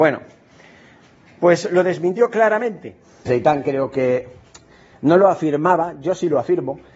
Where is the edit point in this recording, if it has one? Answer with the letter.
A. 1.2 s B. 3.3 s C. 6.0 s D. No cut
B